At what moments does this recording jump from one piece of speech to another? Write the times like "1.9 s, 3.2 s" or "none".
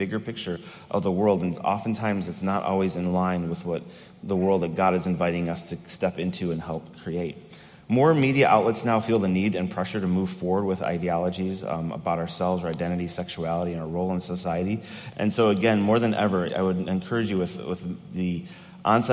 15.1 s, 16.5 s